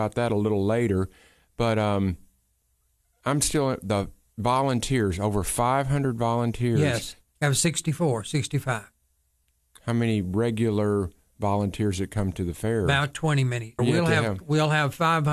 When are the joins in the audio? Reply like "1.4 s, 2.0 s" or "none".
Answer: 7.2 s, 13.8 s